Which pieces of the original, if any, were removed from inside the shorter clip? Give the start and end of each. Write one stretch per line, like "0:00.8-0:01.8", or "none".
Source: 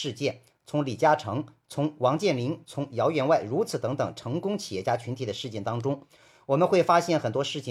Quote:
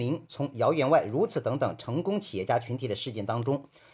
none